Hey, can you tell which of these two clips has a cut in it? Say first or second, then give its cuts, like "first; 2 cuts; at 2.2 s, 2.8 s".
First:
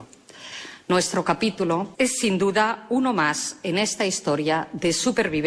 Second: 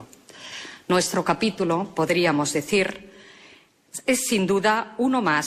first; 1 cut; at 1.9 s